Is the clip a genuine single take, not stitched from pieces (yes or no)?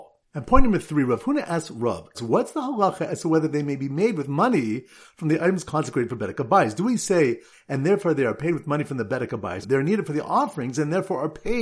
no